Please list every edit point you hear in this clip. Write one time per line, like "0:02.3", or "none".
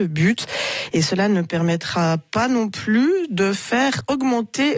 none